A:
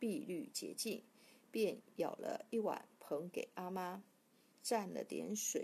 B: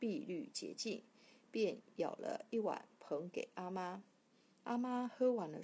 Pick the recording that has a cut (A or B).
A